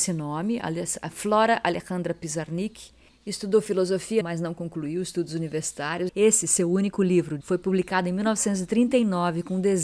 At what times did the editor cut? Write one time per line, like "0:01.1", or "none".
0:04.2
0:06.1
0:07.4